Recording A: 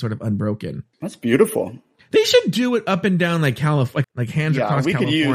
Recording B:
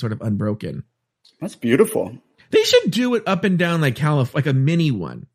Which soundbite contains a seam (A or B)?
A